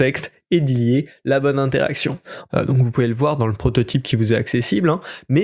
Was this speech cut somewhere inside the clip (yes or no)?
yes